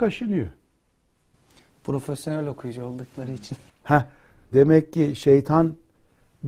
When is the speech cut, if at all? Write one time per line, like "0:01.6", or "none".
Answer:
0:04.5